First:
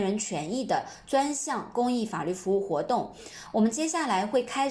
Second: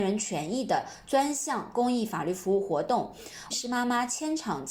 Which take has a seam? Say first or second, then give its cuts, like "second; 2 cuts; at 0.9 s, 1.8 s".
second; 1 cut; at 3.5 s